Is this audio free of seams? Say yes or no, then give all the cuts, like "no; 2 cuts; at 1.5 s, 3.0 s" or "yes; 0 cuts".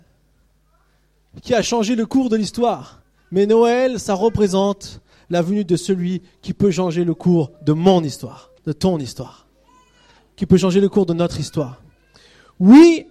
no; 1 cut; at 8.6 s